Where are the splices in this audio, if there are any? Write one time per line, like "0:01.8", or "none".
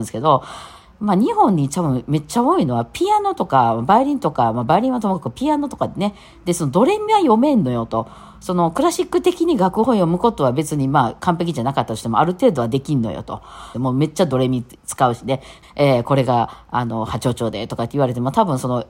0:11.2
0:13.7
0:15.6